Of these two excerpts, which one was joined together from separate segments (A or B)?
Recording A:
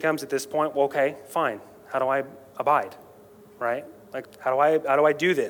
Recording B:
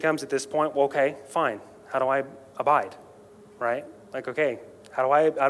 A